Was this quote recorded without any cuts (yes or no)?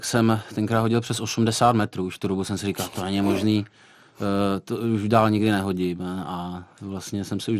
yes